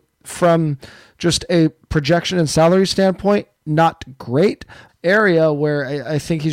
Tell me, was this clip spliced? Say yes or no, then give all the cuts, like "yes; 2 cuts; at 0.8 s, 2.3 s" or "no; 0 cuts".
yes; 1 cut; at 4.9 s